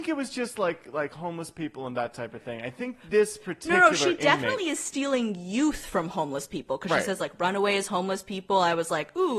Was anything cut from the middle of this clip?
no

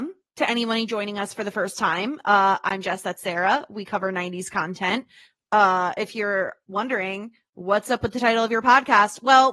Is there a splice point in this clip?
no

